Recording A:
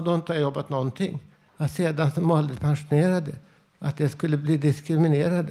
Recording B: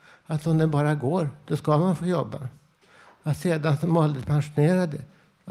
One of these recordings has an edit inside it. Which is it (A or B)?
A